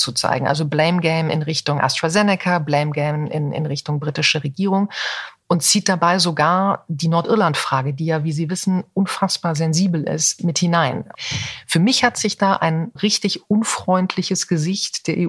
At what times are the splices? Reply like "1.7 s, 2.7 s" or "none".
10.4 s, 13.0 s